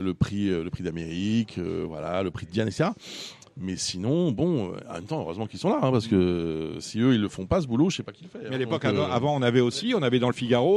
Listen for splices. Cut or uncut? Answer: uncut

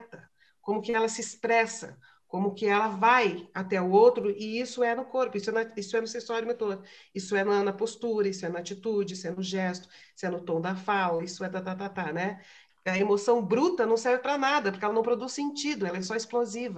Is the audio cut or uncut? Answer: cut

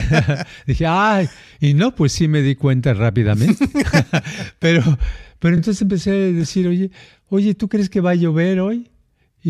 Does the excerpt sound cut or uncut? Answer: uncut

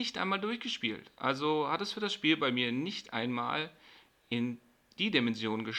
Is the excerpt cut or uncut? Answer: uncut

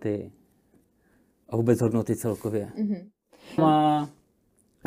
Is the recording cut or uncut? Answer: cut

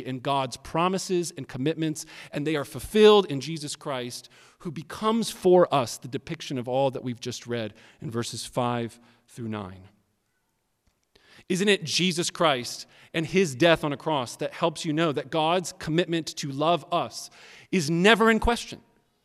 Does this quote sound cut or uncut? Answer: cut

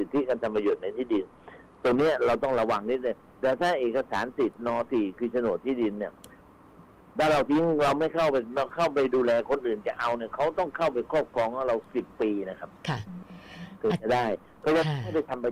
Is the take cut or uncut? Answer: cut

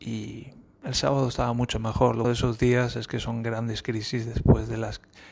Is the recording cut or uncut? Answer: cut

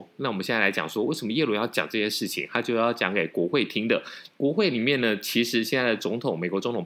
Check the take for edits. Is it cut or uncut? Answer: cut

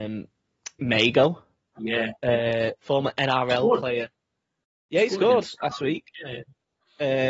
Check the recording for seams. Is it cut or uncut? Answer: cut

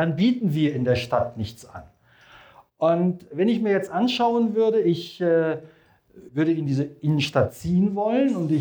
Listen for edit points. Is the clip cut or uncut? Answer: cut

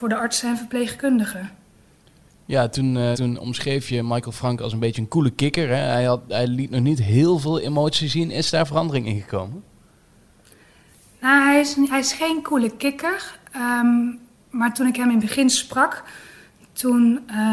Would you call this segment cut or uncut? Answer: cut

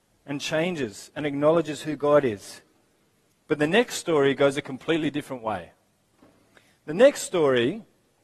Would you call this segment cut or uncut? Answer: uncut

